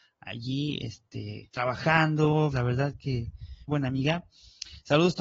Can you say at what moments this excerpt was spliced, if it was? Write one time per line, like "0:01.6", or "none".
0:02.5
0:03.7